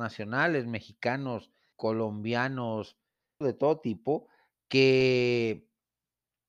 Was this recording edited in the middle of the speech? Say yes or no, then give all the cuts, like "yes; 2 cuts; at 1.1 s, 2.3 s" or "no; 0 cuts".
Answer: yes; 2 cuts; at 1.7 s, 3.4 s